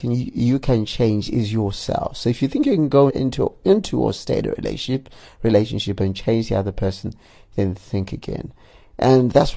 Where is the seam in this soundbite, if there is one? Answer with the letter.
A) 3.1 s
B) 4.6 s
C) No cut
A